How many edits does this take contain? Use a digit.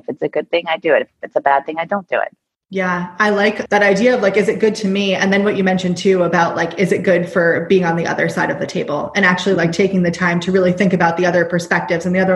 1